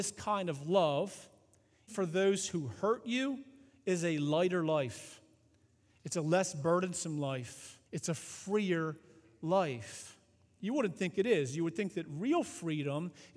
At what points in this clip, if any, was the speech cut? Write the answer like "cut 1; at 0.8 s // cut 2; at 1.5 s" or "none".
cut 1; at 1.9 s // cut 2; at 7.9 s